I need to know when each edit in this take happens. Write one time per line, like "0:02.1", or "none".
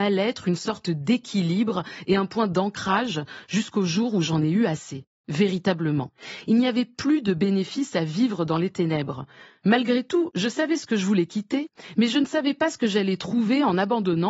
none